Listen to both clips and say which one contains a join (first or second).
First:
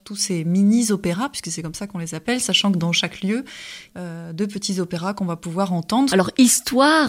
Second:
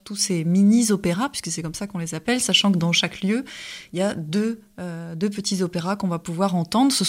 first